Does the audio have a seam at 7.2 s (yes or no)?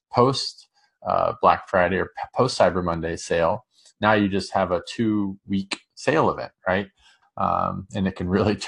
yes